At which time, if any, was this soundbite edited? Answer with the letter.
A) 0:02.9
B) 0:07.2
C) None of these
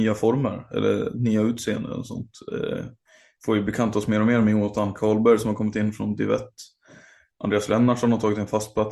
C